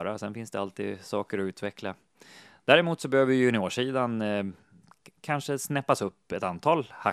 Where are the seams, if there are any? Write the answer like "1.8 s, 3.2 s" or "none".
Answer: none